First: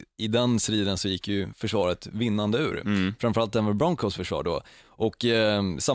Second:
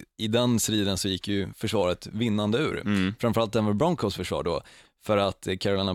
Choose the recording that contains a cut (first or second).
second